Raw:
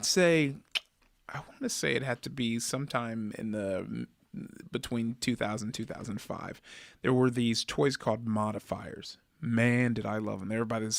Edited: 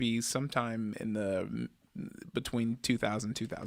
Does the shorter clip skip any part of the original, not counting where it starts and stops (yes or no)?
no